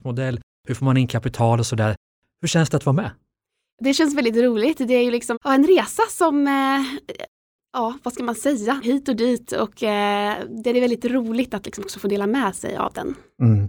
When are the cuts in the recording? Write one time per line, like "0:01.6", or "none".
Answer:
0:05.3
0:08.8

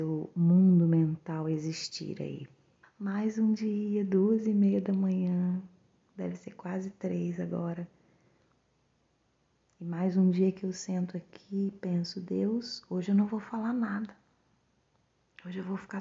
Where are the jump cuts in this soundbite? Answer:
0:02.8

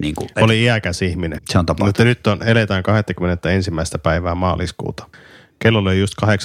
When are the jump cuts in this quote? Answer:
0:01.4

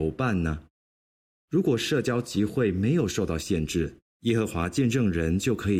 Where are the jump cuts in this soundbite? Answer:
0:01.4
0:04.1

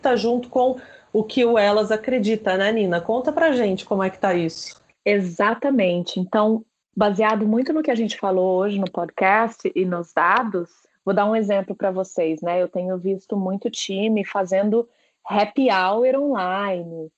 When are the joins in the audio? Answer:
none

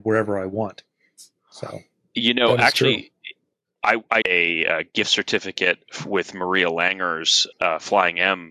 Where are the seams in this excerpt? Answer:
0:04.2
0:07.5

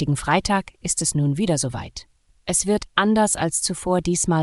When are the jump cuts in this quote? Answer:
0:02.3

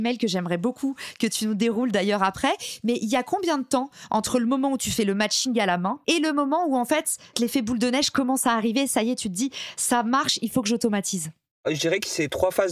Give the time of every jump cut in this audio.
none

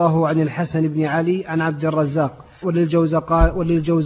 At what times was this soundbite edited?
0:02.6

